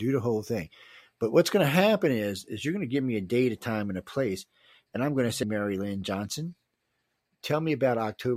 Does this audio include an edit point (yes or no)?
yes